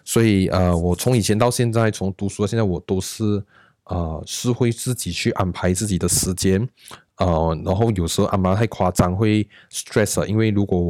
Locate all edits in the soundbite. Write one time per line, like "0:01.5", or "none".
none